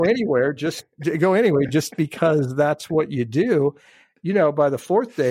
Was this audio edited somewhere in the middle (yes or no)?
no